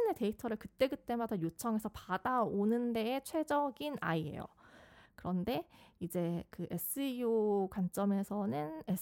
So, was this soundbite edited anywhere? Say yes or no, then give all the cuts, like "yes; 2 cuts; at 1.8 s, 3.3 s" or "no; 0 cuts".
yes; 1 cut; at 5.1 s